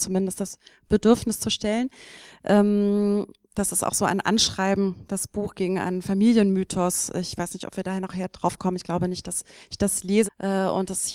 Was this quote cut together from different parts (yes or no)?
yes